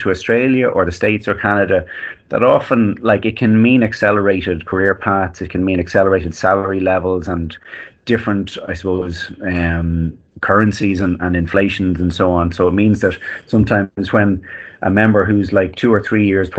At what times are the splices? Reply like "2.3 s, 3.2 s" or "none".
none